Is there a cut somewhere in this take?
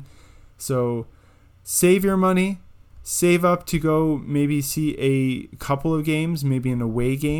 no; 0 cuts

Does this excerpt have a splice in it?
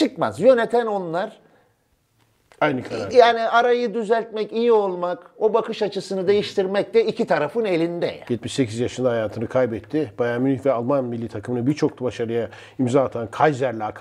yes; 1 cut; at 8.2 s

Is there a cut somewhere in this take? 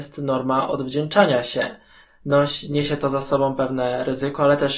yes; 1 cut; at 2.0 s

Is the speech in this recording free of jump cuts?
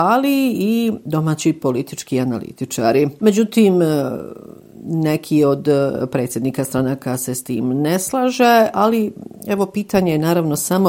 yes; 0 cuts

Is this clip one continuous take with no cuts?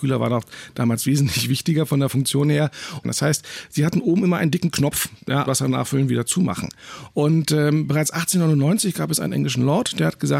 no; 2 cuts; at 3.0 s, 5.5 s

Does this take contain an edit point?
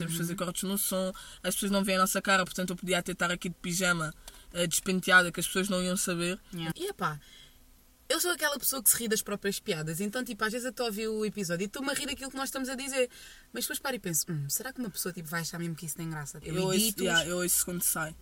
yes; 2 cuts; at 6.7 s, 16.4 s

